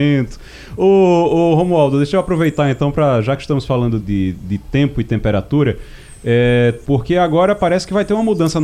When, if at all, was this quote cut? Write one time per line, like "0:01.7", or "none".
0:04.0
0:06.8